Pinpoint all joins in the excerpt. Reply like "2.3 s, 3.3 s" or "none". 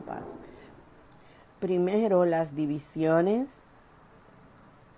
none